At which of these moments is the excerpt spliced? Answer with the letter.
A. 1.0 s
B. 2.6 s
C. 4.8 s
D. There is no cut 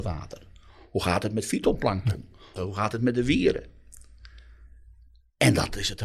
B